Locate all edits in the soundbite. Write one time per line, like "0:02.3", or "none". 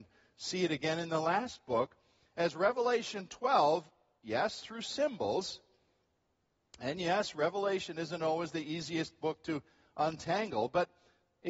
none